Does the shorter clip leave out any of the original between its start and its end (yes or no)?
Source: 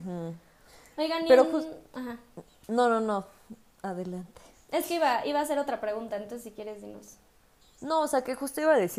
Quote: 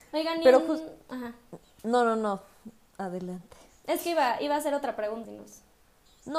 yes